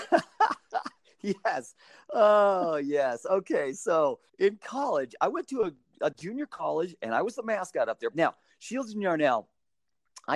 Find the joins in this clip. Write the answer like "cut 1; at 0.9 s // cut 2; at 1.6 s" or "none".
cut 1; at 4.3 s // cut 2; at 8.1 s